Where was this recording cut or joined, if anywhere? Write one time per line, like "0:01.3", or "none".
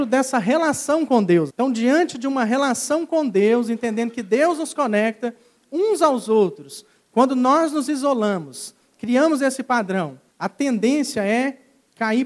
0:01.5
0:10.3